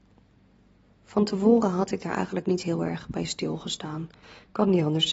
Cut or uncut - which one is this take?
cut